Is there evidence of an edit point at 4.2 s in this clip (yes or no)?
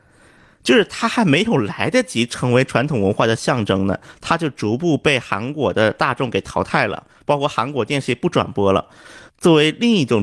no